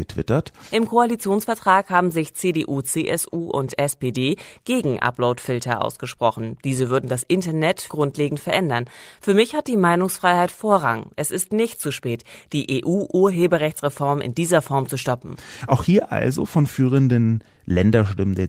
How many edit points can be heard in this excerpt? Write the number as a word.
one